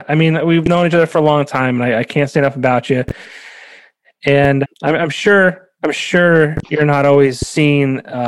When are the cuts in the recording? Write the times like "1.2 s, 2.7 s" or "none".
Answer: 4.6 s